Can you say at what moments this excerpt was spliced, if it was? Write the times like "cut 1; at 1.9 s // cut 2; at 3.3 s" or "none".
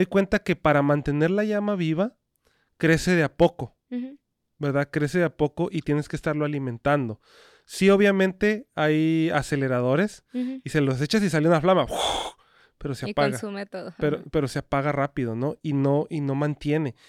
none